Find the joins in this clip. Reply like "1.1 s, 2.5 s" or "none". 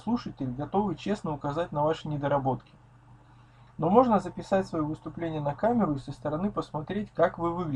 none